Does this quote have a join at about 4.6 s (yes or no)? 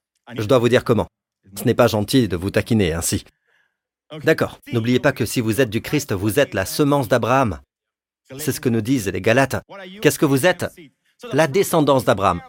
yes